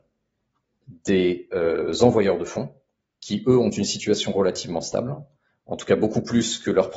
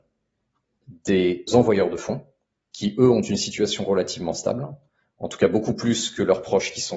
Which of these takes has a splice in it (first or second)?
second